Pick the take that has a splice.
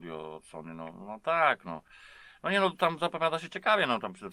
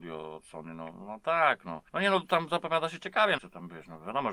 second; 2 cuts; at 1.9 s, 3.4 s

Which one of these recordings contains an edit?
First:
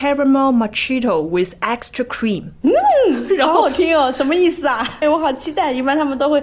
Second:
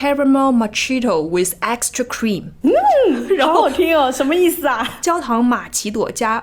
first; 1 cut; at 5.0 s

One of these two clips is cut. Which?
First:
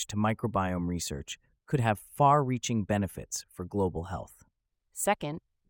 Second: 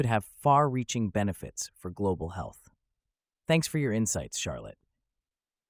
first; 1 cut; at 4.7 s

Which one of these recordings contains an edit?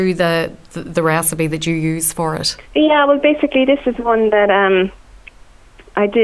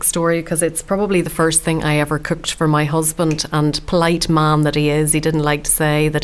first; 1 cut; at 2.6 s

